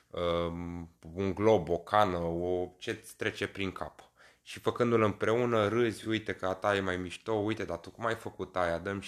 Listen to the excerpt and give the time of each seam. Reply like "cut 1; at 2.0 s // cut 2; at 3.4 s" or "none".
none